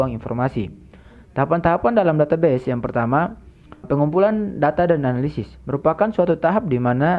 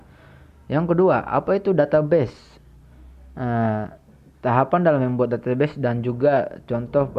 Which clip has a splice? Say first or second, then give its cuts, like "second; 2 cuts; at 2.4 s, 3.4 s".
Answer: first; 1 cut; at 3.8 s